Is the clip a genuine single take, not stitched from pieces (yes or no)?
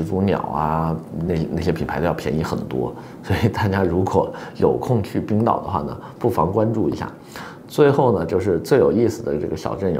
yes